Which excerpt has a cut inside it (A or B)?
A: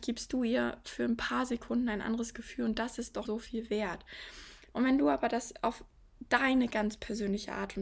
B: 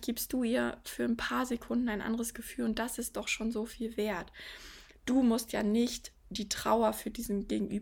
A